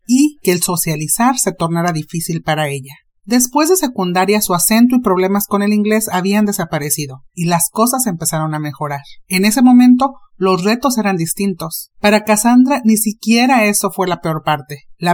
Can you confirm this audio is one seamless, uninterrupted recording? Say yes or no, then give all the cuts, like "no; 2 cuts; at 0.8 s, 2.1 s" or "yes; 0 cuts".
no; 1 cut; at 11.9 s